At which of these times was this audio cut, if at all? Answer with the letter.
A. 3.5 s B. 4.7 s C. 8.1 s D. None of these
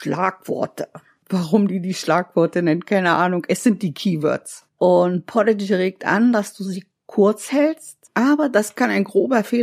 C